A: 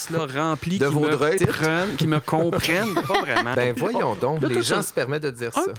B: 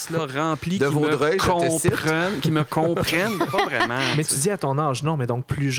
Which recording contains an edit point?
A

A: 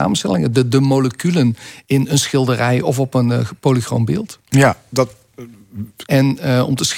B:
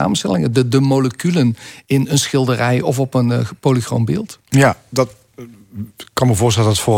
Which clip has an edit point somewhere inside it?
A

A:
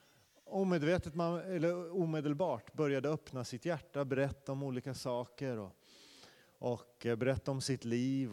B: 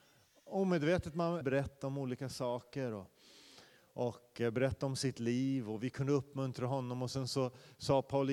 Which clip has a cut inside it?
B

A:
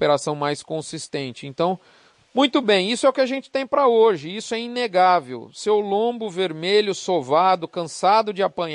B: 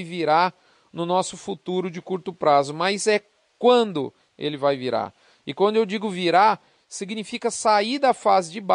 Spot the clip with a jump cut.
A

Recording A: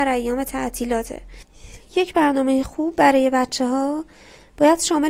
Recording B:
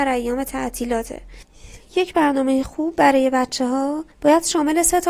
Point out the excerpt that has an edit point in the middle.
B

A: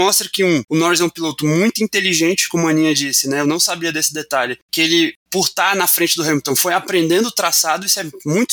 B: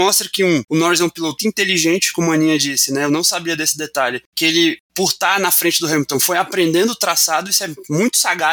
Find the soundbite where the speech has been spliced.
B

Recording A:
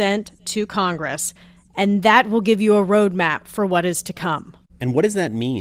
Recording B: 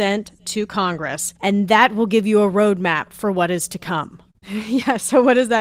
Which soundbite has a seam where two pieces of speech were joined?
B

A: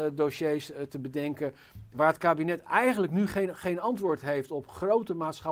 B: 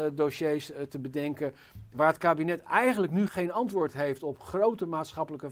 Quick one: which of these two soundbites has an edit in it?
B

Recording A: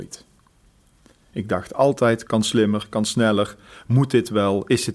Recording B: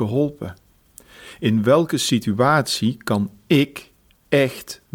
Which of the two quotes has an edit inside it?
A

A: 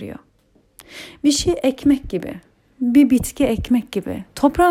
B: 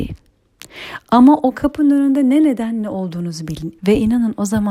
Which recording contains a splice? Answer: B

